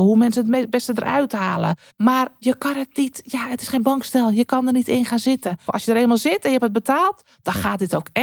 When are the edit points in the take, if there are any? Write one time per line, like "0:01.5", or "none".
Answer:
0:01.9
0:05.7